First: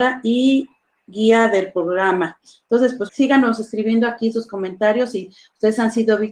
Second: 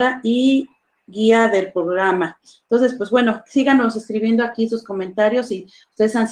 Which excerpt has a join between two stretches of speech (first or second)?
first